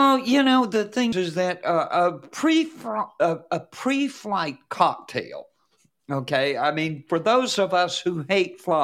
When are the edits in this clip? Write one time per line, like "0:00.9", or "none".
0:01.1